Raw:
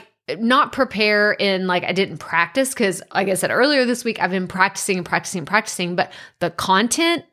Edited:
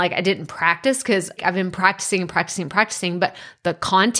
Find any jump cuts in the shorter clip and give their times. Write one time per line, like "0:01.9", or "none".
0:01.4